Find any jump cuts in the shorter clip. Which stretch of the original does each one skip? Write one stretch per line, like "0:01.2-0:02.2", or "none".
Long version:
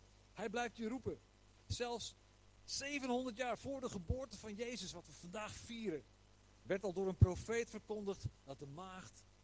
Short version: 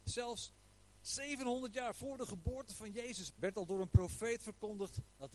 0:04.9-0:06.6